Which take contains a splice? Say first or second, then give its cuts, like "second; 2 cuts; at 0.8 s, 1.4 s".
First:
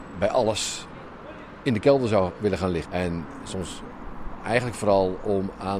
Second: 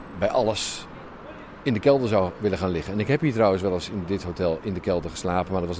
first; 1 cut; at 2.8 s